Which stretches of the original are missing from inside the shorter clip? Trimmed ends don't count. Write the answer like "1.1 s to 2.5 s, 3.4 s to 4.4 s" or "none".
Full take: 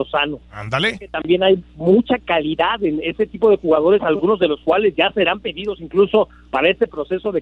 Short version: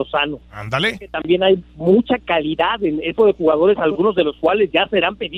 3.2 s to 3.4 s